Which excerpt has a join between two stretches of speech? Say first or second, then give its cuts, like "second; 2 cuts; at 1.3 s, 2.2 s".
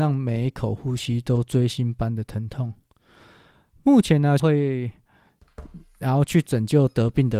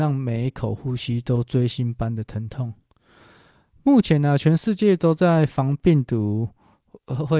first; 1 cut; at 4.4 s